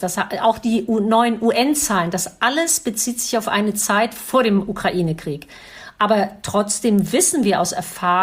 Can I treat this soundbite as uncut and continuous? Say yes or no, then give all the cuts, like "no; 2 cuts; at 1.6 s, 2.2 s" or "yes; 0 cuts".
yes; 0 cuts